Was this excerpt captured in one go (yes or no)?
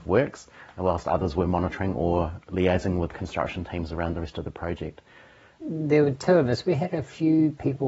no